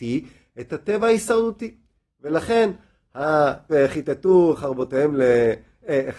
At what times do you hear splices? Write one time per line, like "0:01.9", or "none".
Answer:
0:03.7

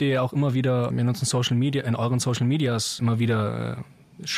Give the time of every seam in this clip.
0:00.9
0:03.0

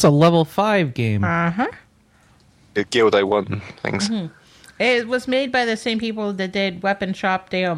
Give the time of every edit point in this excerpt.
0:02.8

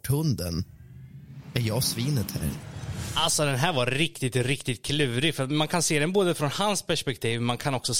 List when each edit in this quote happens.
none

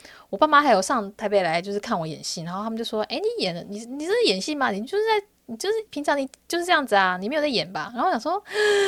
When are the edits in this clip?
none

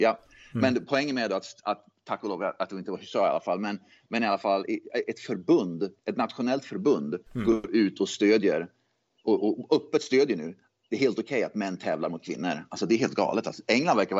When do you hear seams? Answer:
0:06.0

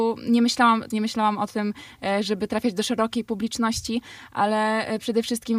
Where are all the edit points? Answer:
0:00.9

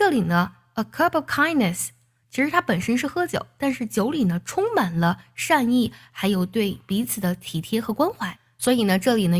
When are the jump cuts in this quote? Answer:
none

